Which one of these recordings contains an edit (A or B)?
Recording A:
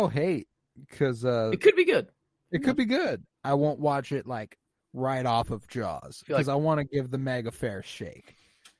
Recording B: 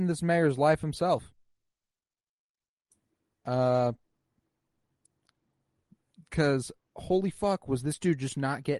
A